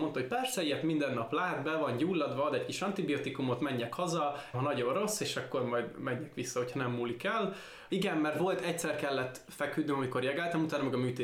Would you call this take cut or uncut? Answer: cut